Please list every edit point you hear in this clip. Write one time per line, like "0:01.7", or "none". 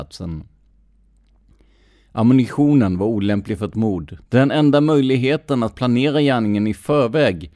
0:04.2